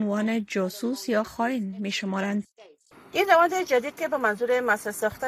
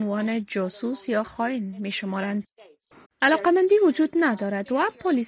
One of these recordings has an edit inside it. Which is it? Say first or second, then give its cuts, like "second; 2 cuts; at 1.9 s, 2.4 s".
second; 1 cut; at 3.0 s